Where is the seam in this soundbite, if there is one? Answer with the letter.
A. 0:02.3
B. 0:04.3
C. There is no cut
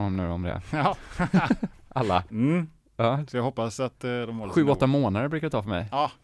A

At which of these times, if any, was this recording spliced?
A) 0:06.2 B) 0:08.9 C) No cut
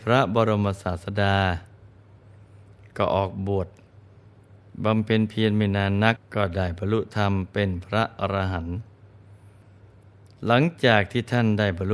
A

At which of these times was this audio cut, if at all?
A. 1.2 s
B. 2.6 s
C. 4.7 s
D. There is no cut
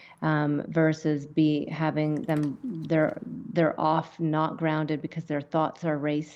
D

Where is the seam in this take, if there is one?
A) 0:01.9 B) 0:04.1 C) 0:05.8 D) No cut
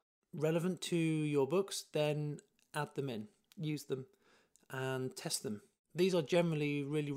C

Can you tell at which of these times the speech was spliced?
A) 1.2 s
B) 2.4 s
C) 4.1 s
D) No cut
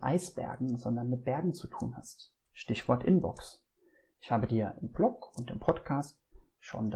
B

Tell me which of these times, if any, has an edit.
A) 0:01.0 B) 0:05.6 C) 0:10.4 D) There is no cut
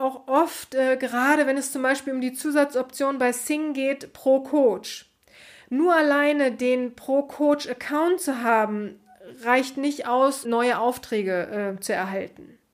C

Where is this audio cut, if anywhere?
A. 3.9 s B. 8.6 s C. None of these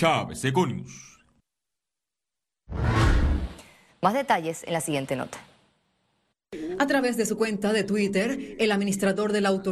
A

